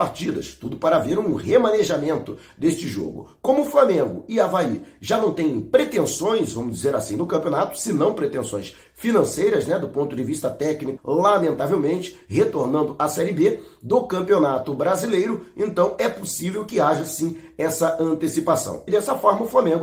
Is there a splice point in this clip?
yes; 2 cuts; at 11.0 s, 18.9 s

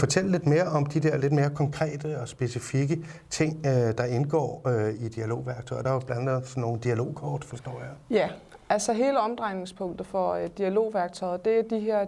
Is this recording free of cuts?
yes; 0 cuts

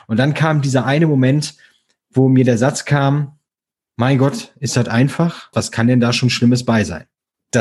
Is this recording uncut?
no; 1 cut; at 5.5 s

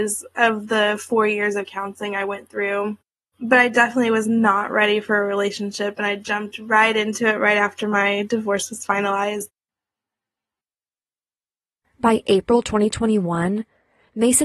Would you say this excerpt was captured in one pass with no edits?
yes; 0 cuts

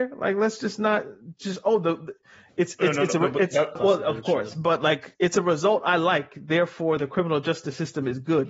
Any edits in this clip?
yes; 2 cuts; at 3.8 s, 5.1 s

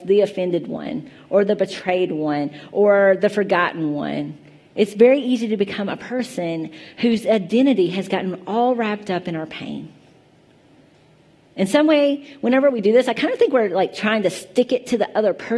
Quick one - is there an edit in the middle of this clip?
no; 0 cuts

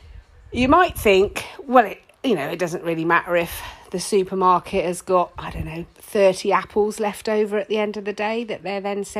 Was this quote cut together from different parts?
no; 0 cuts

